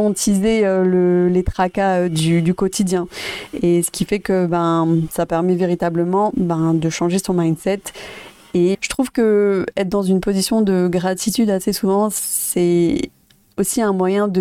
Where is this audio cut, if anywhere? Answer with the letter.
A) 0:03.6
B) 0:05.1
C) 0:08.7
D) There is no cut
C